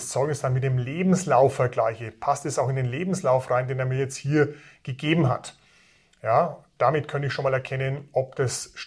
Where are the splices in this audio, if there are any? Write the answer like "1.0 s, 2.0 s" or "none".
none